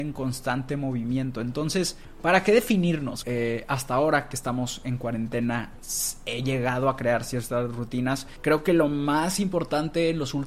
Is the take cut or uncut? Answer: cut